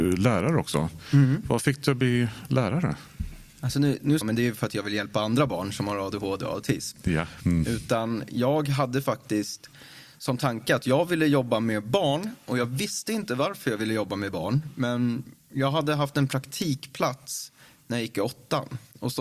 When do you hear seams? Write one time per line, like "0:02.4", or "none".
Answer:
0:04.2
0:07.4